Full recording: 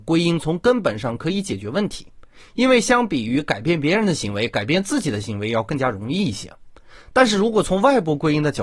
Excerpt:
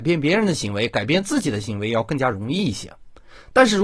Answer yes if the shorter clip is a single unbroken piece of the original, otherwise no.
yes